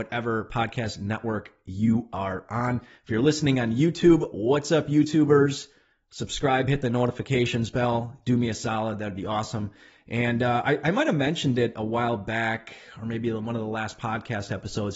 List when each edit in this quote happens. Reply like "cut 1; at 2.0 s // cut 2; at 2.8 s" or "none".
none